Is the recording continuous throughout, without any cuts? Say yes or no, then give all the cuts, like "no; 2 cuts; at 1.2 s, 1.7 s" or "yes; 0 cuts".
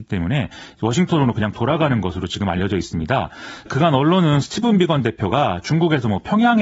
no; 1 cut; at 3.7 s